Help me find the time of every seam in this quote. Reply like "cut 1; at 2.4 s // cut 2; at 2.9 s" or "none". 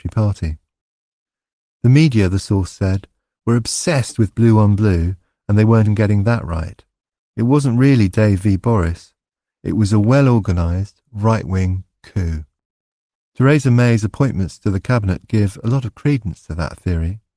cut 1; at 5.9 s